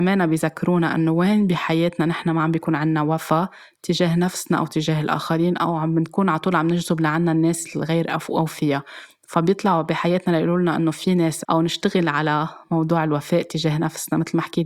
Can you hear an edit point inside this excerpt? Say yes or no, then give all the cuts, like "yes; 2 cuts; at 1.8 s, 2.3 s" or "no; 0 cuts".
yes; 1 cut; at 11.4 s